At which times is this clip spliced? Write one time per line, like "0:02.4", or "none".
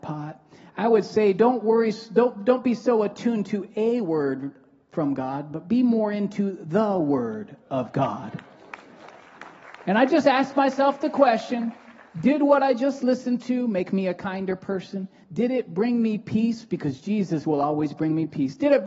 none